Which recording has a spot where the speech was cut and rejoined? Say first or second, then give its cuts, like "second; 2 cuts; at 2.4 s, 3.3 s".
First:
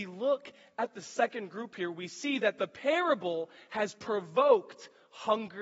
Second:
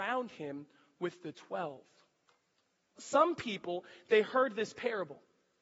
second; 1 cut; at 3.0 s